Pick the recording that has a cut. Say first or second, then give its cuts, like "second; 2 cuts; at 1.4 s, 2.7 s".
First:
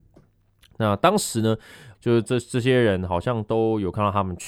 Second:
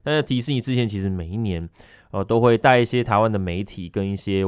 first; 1 cut; at 1.9 s